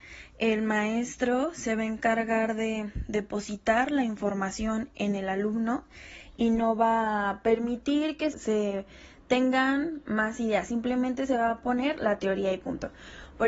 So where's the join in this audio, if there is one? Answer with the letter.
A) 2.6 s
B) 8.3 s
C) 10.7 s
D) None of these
B